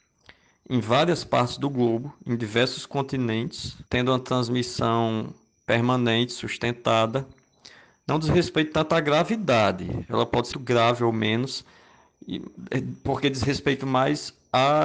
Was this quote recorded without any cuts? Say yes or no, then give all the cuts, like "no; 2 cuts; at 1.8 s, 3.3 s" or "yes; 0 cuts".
no; 2 cuts; at 3.9 s, 10.5 s